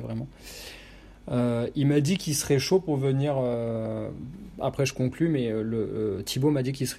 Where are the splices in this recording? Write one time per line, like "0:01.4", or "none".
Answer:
none